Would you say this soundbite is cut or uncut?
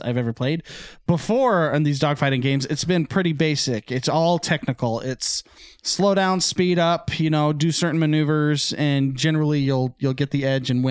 uncut